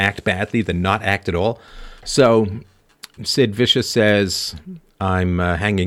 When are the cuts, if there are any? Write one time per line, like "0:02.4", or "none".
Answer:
0:02.0
0:03.2